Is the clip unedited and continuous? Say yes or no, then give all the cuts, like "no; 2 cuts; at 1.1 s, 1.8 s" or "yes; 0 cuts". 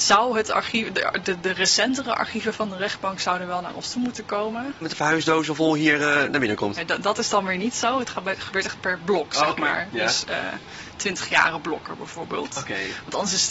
no; 1 cut; at 4.8 s